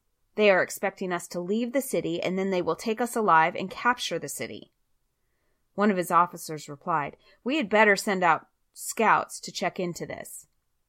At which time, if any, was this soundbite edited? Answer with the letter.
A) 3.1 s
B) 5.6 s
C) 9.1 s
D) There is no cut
D